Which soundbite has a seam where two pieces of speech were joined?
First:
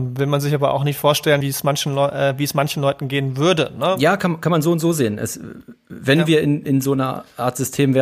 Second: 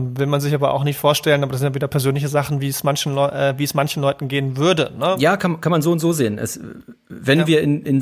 first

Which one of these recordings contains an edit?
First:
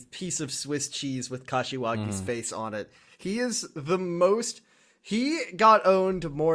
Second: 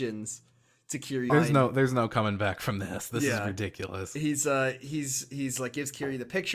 second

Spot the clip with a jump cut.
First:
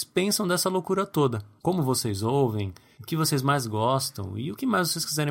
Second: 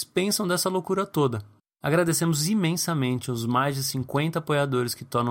second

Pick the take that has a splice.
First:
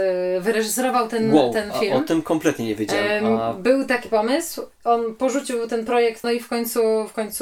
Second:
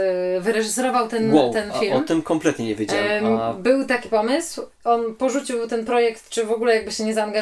first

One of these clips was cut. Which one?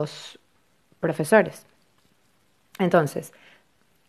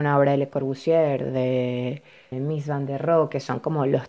second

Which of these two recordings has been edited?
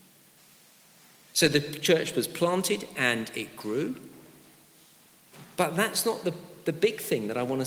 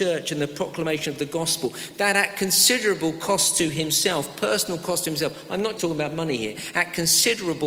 second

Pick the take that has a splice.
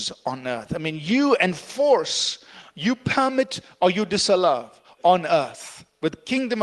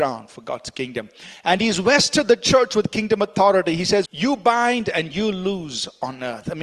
second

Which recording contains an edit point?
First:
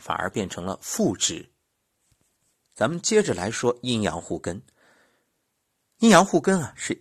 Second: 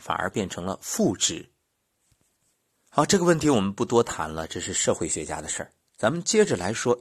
first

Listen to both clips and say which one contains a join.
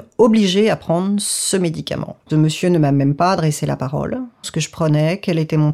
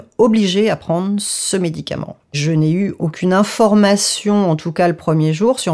first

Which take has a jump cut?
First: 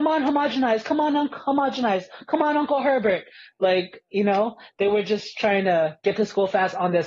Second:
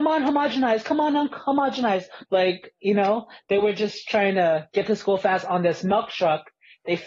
second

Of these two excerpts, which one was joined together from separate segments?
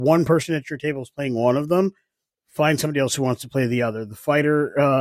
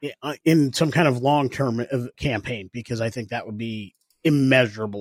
second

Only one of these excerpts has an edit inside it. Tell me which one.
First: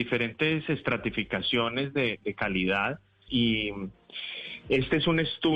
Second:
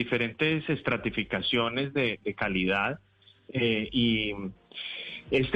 first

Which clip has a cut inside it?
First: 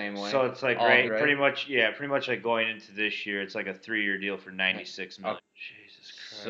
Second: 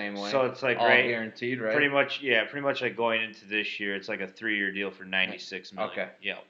first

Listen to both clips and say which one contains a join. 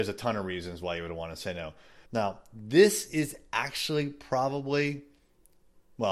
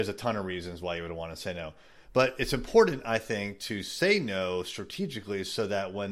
first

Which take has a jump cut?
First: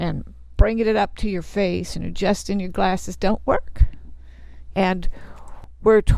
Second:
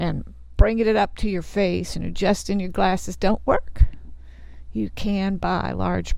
first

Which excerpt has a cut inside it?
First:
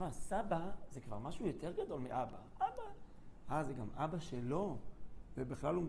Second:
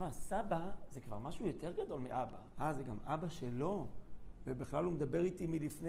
second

